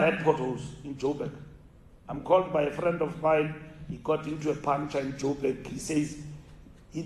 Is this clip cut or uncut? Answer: uncut